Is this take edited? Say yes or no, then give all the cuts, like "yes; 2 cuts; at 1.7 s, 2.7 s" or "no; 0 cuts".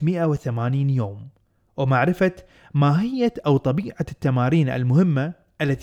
no; 0 cuts